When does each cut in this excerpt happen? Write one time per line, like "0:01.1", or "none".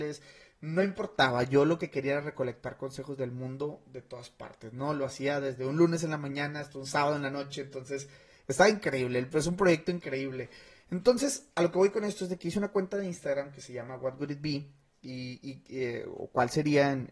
none